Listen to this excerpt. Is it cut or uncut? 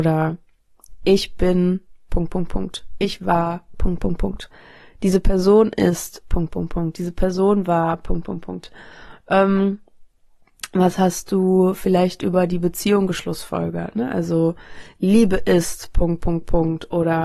uncut